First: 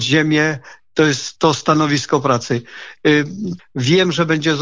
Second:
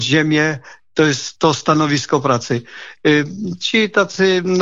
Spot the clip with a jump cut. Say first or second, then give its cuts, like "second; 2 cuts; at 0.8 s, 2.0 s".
first; 1 cut; at 3.6 s